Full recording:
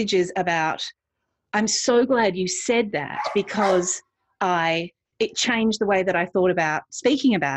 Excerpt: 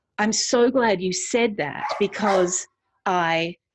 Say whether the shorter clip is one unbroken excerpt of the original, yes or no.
yes